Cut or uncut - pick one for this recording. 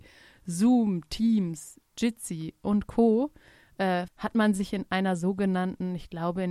cut